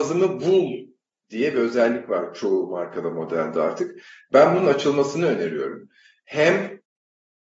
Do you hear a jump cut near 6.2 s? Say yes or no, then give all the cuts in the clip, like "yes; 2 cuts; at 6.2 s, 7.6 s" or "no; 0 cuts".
yes; 1 cut; at 6.2 s